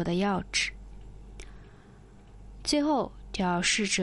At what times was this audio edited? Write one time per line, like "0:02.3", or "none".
none